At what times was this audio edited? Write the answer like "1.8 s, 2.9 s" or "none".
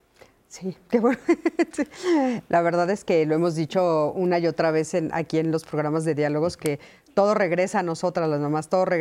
none